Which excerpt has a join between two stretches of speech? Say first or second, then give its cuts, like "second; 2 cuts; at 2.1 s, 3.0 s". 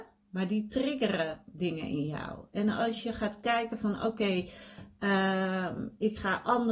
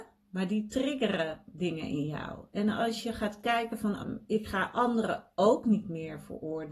second; 1 cut; at 4.0 s